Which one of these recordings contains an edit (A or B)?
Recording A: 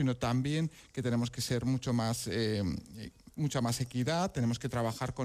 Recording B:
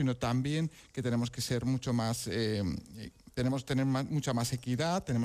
A